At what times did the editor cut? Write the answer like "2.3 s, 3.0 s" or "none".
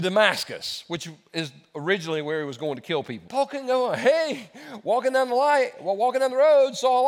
3.3 s